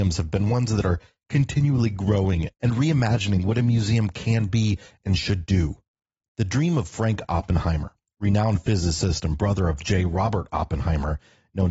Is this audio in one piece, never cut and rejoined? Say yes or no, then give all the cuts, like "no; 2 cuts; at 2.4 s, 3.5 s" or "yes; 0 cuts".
no; 1 cut; at 6.2 s